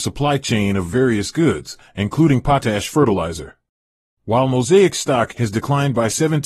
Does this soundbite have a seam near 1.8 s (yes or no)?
no